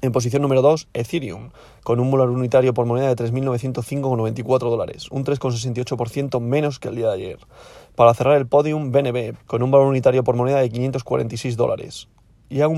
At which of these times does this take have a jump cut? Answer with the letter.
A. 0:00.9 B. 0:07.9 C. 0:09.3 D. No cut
C